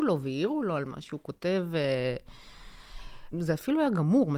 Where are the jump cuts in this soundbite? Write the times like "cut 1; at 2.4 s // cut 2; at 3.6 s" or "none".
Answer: cut 1; at 3.3 s